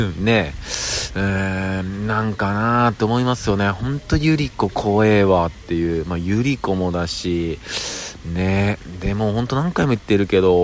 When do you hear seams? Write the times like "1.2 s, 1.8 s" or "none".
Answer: none